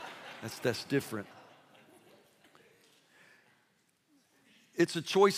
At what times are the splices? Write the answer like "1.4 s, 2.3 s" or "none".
none

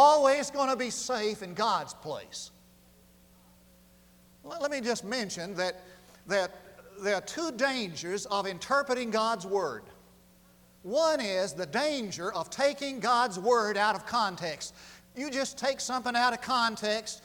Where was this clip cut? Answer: 15.0 s

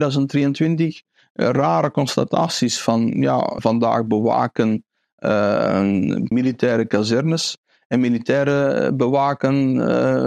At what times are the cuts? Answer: 3.6 s, 6.3 s

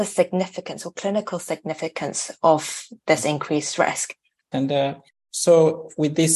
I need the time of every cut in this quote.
4.5 s

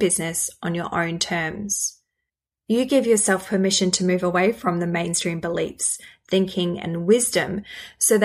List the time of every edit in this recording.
none

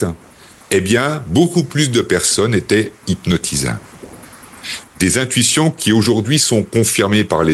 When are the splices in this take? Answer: 4.8 s

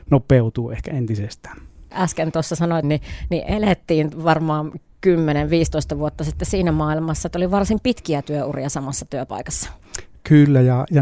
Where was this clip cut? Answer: 2.8 s

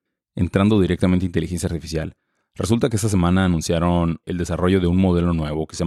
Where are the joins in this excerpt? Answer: 4.2 s

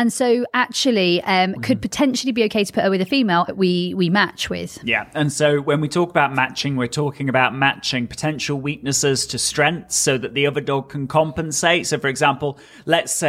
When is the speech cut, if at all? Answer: 1.6 s, 3.5 s

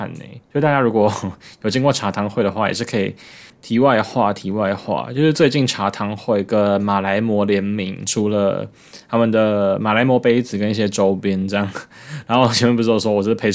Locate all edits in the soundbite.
3.5 s

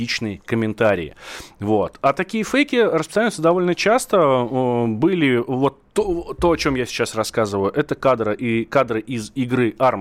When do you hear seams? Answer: none

